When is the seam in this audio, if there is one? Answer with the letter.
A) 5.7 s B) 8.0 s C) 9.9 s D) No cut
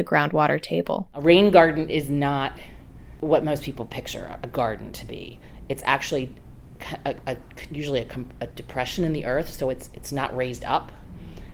C